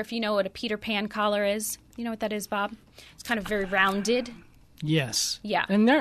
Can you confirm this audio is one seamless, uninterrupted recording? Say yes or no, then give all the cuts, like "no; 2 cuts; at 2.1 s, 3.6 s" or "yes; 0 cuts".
yes; 0 cuts